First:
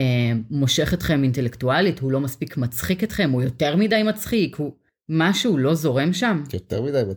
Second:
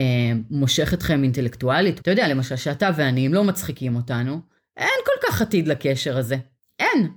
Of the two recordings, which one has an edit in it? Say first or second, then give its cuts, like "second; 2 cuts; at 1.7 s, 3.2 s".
second; 1 cut; at 2.0 s